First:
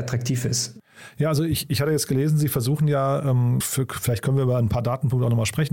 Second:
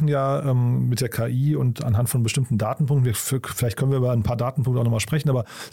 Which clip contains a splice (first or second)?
first